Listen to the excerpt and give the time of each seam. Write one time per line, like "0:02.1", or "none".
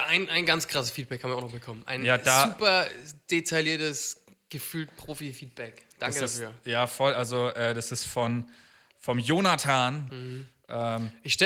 0:08.9
0:10.1